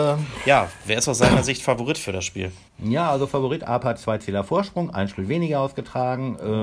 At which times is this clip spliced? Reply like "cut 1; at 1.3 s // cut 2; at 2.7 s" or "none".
cut 1; at 2.7 s